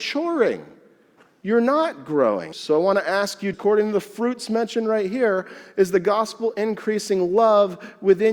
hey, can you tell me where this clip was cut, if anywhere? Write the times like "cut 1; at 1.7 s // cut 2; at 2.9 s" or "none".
cut 1; at 2.5 s // cut 2; at 3.5 s